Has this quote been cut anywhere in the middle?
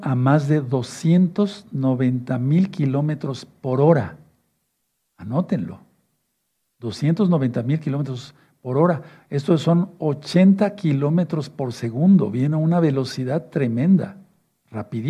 no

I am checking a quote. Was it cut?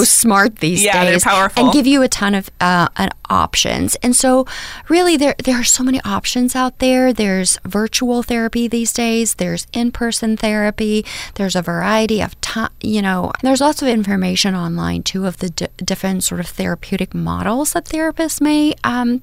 yes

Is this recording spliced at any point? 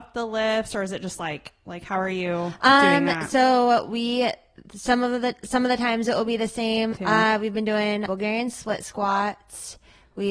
yes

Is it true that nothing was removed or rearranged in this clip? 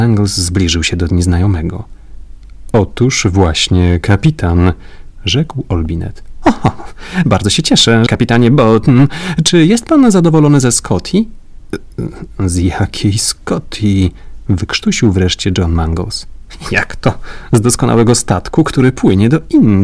no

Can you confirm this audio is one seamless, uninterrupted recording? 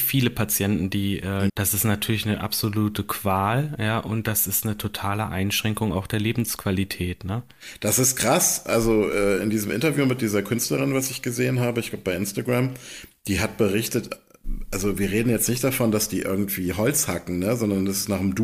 no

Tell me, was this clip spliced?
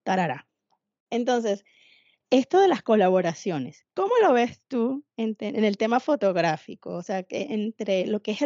no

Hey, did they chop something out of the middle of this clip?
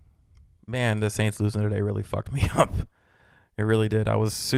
no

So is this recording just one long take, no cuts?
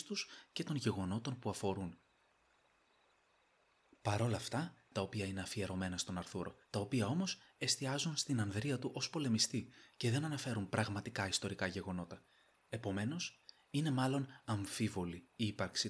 no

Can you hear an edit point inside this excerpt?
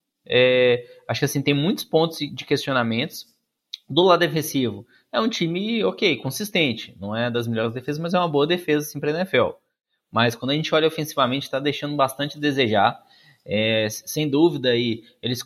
no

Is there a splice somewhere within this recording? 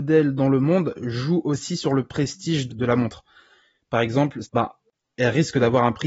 yes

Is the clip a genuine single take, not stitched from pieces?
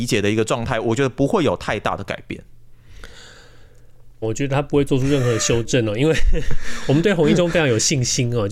no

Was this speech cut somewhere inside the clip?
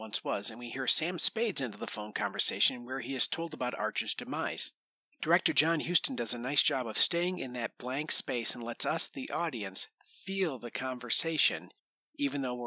no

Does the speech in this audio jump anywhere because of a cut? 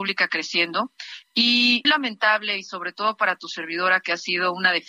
yes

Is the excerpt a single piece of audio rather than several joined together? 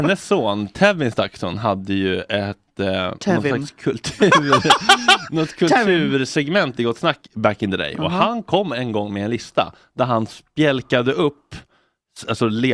yes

